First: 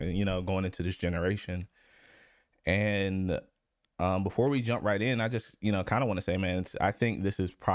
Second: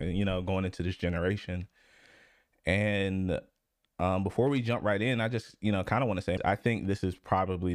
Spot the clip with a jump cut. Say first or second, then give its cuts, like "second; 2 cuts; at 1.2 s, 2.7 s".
second; 1 cut; at 6.4 s